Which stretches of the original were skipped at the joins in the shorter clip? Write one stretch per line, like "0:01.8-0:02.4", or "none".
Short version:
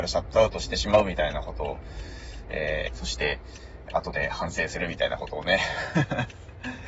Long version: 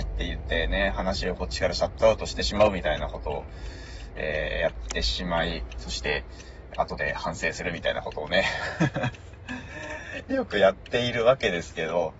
0:04.5-0:05.7